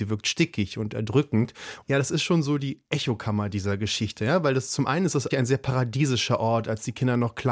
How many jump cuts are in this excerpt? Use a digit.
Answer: 2